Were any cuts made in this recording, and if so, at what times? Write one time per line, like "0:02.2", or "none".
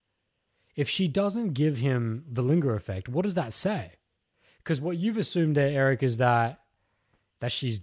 none

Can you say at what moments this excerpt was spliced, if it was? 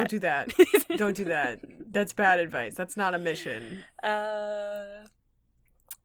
none

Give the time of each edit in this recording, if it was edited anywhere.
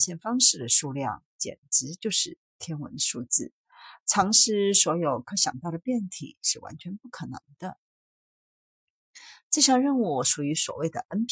none

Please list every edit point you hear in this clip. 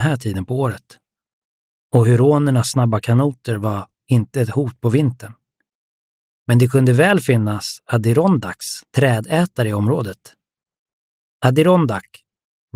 none

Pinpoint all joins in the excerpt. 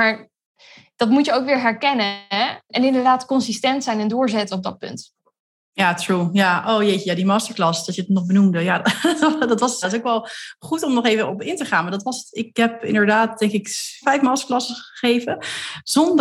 0:09.8
0:14.0

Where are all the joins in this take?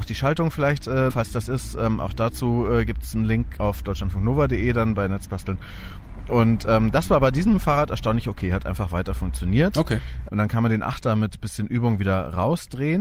0:01.1
0:10.3

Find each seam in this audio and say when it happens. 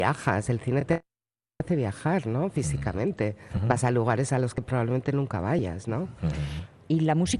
none

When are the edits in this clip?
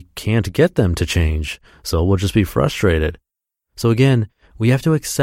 none

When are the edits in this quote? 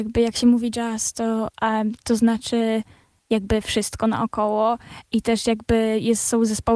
none

